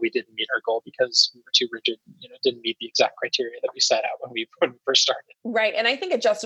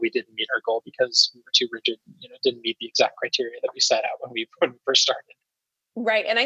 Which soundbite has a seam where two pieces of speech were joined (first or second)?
first